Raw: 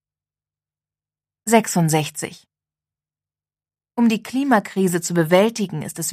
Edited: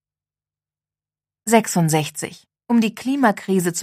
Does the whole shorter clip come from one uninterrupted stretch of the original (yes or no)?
no